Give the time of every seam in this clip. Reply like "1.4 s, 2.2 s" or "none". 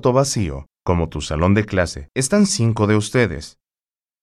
2.1 s